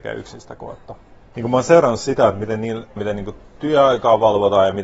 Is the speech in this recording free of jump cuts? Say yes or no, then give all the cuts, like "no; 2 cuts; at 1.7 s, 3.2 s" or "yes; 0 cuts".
no; 2 cuts; at 1.3 s, 3.0 s